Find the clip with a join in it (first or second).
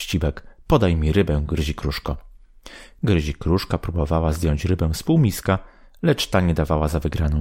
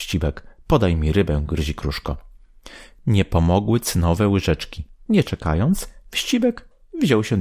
second